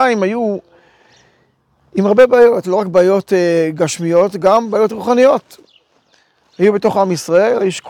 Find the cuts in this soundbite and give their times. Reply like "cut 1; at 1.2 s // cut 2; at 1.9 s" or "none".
cut 1; at 2.6 s